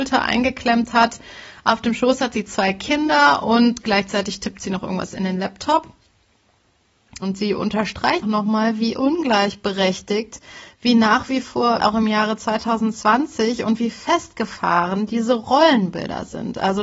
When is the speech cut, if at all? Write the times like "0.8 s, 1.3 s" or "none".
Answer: 7.2 s, 8.2 s, 11.8 s